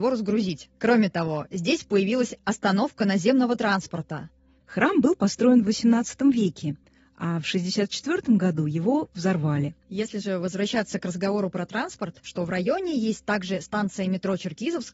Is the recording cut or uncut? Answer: cut